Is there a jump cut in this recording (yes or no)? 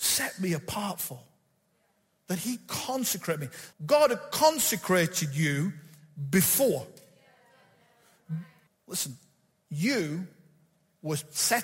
yes